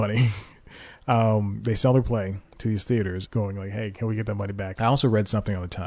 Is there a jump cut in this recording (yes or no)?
yes